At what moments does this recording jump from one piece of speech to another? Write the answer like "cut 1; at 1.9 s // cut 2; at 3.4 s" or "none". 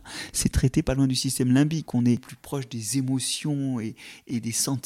cut 1; at 1.9 s